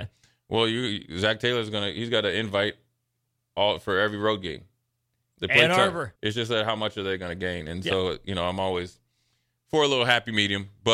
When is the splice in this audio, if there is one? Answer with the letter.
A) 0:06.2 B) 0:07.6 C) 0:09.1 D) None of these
A